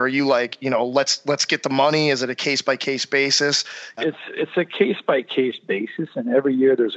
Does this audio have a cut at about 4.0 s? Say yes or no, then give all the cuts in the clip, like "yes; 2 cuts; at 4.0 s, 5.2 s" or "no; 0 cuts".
yes; 1 cut; at 4.0 s